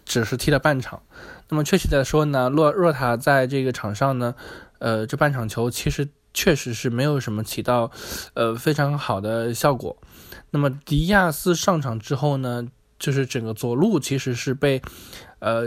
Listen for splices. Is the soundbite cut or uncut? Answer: uncut